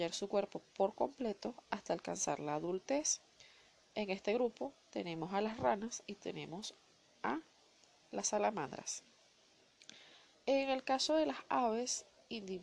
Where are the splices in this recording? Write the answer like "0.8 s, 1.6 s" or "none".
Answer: 10.3 s